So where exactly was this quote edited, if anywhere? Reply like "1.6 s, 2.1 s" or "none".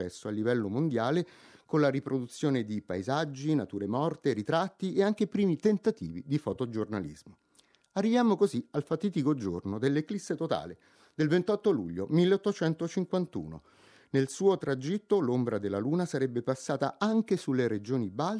none